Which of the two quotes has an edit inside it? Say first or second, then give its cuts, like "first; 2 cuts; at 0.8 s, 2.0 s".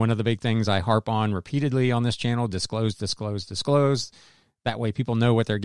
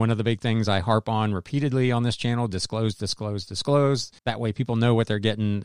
second; 1 cut; at 4.2 s